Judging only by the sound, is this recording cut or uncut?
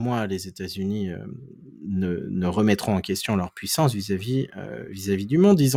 uncut